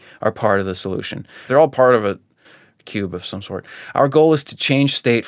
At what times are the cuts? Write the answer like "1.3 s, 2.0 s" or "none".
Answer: 1.5 s

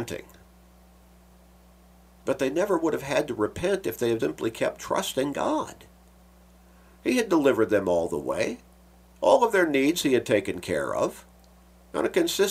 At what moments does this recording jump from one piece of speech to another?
4.2 s

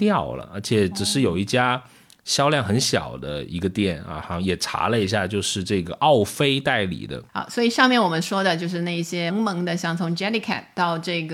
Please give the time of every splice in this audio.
7.3 s, 9.3 s

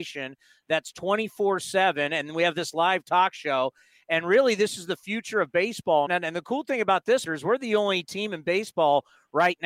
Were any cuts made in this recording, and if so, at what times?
6.1 s, 7.3 s

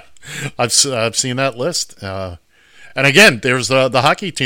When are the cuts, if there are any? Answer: none

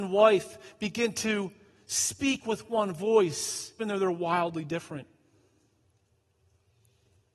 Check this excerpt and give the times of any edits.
3.8 s

